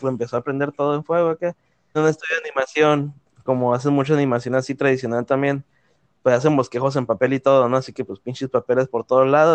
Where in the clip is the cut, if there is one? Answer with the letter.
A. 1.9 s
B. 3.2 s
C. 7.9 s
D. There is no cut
A